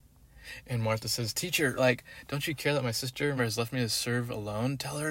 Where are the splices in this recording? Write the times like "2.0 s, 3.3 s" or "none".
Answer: 1.8 s, 3.4 s